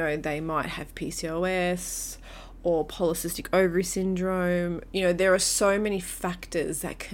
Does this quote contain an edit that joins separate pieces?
no; 0 cuts

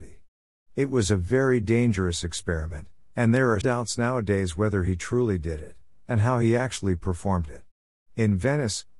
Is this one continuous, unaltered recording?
no; 2 cuts; at 3.6 s, 8.0 s

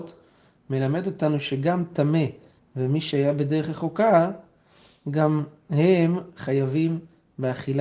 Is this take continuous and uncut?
yes; 0 cuts

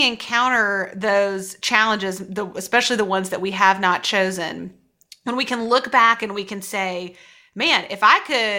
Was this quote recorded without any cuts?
yes; 0 cuts

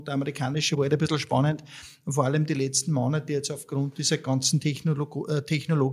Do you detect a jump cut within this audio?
no; 0 cuts

